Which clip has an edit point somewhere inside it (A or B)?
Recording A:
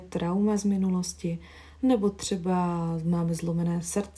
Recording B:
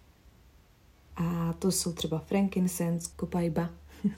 B